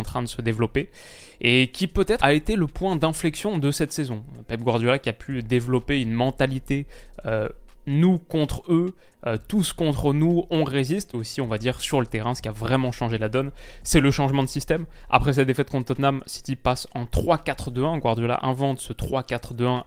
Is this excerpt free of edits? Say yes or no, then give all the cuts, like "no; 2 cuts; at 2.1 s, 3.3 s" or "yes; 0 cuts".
no; 2 cuts; at 2.2 s, 11.1 s